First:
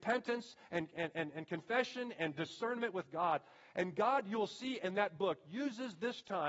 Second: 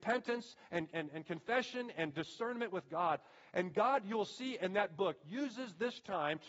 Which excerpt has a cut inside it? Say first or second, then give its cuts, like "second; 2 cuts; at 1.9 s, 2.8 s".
second; 1 cut; at 0.9 s